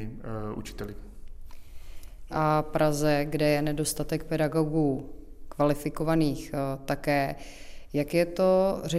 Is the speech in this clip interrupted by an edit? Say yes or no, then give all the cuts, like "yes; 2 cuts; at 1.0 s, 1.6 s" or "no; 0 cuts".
yes; 1 cut; at 2.3 s